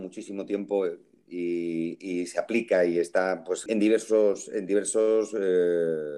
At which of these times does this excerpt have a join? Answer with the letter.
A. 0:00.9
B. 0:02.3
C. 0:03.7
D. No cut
C